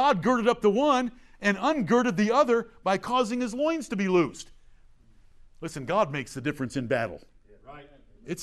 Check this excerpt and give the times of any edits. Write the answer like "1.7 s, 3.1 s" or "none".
none